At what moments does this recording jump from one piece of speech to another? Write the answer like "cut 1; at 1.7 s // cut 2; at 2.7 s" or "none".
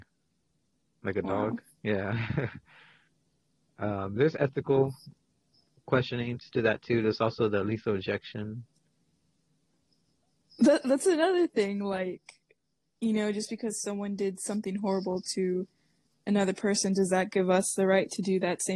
none